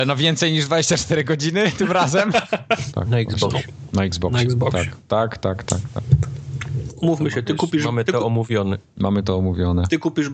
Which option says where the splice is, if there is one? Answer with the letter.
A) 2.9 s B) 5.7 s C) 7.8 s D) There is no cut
A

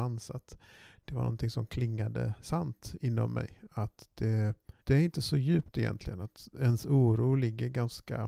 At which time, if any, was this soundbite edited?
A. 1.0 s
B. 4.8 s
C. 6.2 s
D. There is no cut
B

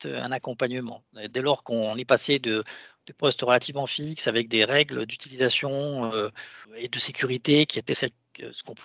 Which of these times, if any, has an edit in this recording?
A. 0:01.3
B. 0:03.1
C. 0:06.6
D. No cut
C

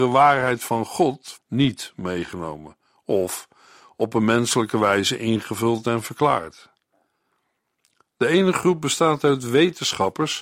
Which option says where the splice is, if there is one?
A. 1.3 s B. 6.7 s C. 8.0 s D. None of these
A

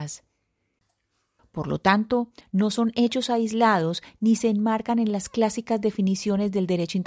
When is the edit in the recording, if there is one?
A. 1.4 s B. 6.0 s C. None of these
A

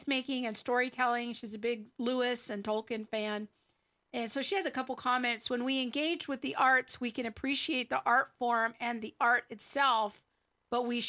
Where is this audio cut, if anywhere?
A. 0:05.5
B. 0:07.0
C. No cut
C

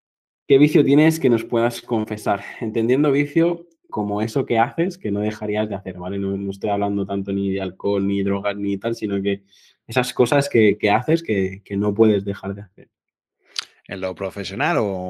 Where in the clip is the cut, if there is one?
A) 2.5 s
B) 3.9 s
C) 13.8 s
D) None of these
B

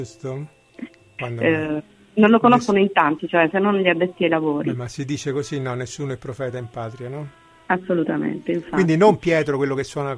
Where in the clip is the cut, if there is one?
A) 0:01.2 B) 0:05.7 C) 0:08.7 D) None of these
A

